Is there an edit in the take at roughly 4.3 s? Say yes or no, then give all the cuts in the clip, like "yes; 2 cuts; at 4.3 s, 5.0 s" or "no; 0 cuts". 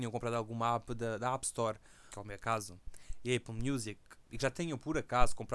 yes; 2 cuts; at 2.1 s, 4.3 s